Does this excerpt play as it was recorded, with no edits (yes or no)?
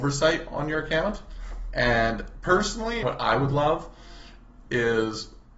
no